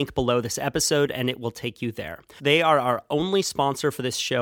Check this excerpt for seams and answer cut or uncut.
cut